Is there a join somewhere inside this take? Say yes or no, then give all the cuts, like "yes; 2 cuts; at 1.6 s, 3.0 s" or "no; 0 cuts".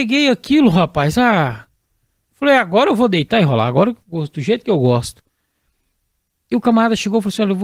no; 0 cuts